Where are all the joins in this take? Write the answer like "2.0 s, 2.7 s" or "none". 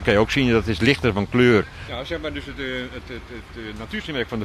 1.9 s